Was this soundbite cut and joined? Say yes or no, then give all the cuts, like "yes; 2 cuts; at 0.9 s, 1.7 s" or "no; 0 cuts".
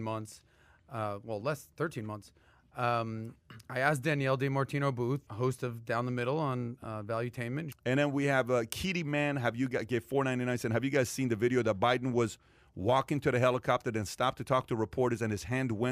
yes; 2 cuts; at 5.3 s, 7.7 s